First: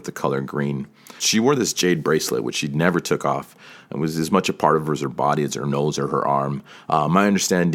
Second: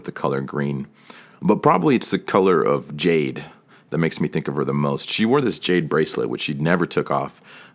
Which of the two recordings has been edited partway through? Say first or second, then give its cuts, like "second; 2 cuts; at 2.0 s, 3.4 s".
first; 1 cut; at 1.2 s